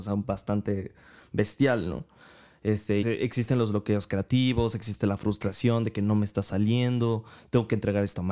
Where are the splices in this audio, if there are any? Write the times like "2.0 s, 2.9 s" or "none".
3.0 s